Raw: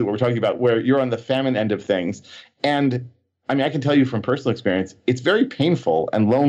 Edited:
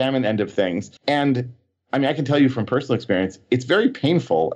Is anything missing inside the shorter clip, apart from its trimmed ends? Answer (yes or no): yes